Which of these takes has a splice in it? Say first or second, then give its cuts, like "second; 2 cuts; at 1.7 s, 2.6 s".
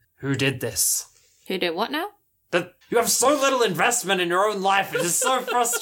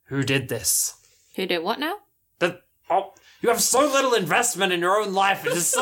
first; 1 cut; at 2.8 s